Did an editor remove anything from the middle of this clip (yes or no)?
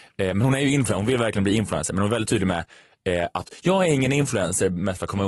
no